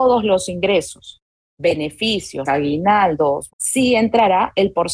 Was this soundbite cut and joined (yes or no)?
yes